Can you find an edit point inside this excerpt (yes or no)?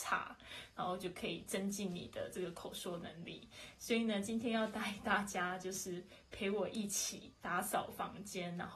no